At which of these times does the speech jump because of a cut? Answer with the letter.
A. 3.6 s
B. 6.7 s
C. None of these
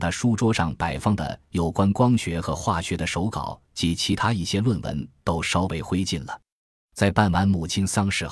B